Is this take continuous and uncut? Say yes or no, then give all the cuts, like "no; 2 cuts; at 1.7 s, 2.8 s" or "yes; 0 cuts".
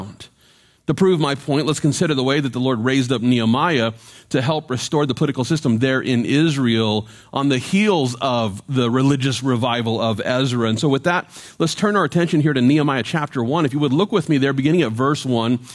yes; 0 cuts